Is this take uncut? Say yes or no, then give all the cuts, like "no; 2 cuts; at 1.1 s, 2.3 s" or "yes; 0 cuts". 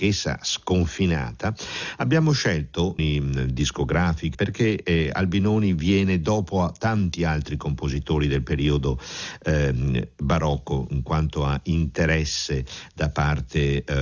no; 2 cuts; at 3.0 s, 4.3 s